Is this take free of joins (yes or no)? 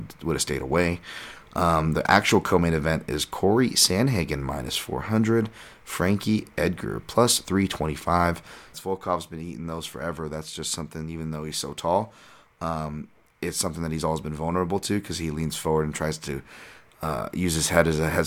no